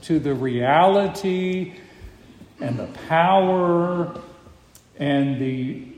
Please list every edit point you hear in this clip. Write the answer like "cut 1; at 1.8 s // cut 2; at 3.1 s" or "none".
none